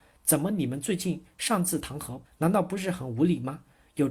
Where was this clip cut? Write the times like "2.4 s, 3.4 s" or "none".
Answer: 2.2 s